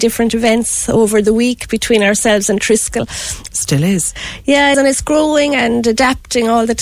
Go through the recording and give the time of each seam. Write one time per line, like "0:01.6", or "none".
0:03.5
0:04.7